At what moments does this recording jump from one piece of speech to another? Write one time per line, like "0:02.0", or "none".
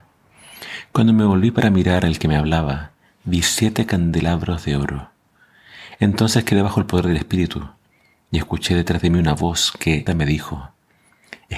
0:06.0
0:10.1